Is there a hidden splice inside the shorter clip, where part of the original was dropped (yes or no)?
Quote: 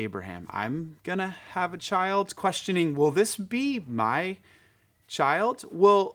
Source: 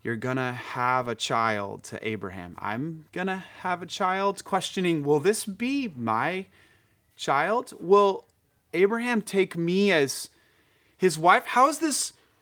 no